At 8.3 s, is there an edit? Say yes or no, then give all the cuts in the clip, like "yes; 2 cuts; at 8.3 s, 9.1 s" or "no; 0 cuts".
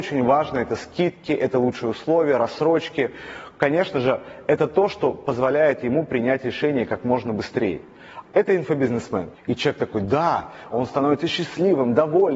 yes; 3 cuts; at 8.3 s, 9.3 s, 10.7 s